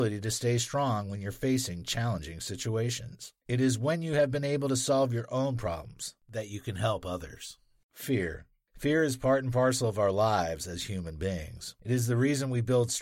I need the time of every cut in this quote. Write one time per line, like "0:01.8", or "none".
none